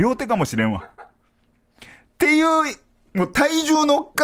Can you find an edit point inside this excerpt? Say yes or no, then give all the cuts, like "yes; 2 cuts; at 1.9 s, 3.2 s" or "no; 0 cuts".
no; 0 cuts